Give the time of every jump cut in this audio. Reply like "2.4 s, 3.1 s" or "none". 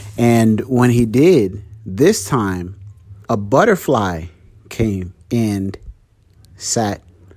3.2 s, 5.2 s